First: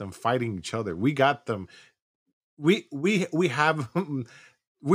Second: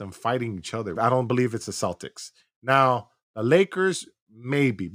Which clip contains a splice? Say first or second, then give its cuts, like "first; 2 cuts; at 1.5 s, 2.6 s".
second; 1 cut; at 1.0 s